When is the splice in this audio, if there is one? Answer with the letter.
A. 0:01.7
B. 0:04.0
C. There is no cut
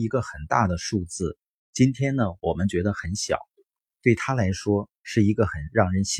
B